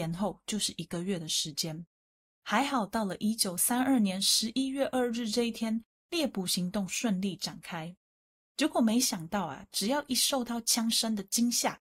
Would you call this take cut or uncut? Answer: cut